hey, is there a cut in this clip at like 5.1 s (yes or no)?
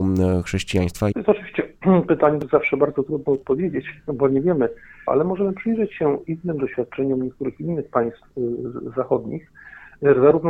yes